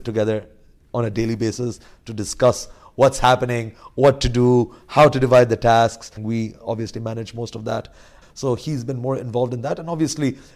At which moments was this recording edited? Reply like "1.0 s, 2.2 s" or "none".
6.2 s, 8.2 s